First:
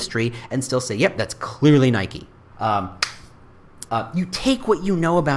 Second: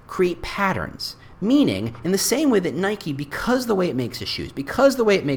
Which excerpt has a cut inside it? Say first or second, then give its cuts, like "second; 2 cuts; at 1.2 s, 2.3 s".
first; 2 cuts; at 2.5 s, 3.9 s